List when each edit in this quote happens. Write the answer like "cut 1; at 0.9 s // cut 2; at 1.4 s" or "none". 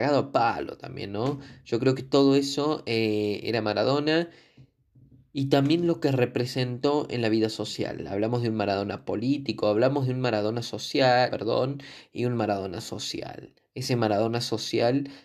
cut 1; at 11.3 s

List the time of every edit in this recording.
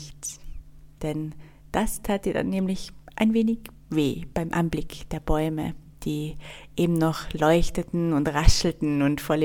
cut 1; at 1.0 s

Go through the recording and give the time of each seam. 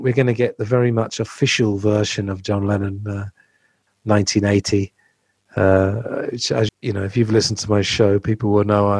cut 1; at 6.7 s

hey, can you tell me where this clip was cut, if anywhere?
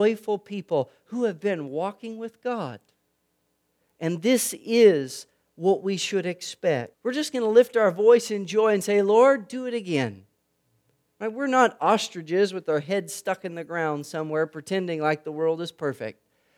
cut 1; at 6.9 s

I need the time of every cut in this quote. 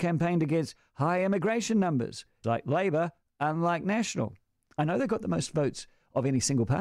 cut 1; at 2.4 s // cut 2; at 4.7 s

